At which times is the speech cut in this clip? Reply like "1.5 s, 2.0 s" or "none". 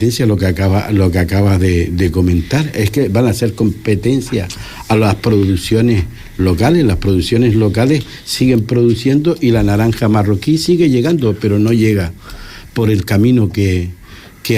none

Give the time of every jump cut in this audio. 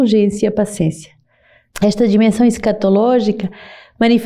1.7 s

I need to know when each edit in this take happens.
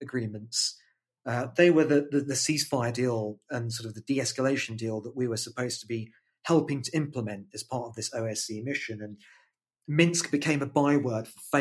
none

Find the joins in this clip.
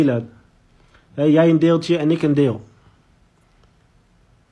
none

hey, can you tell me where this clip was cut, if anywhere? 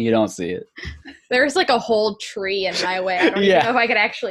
none

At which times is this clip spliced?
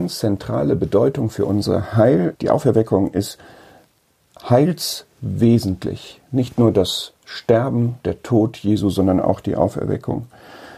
2.3 s

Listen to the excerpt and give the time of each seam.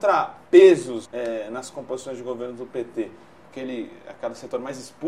1.0 s, 3.4 s

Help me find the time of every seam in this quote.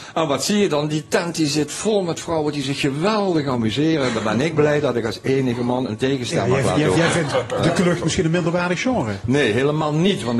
6.9 s

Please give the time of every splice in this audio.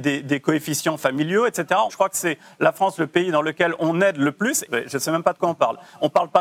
1.9 s, 4.7 s

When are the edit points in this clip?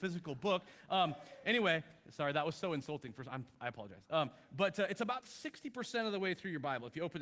none

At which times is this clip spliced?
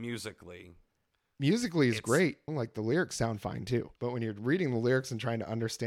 2.5 s, 4.0 s

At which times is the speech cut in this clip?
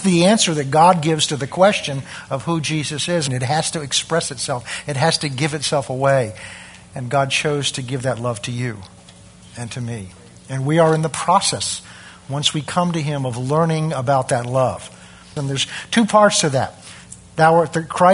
3.3 s, 15.4 s

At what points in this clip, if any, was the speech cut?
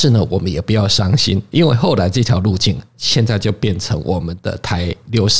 none

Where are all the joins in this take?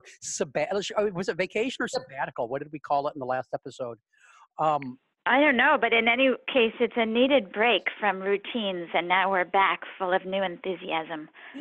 none

